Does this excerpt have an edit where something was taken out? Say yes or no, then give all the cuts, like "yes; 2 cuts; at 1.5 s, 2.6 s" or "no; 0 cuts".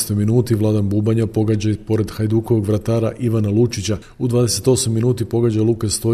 no; 0 cuts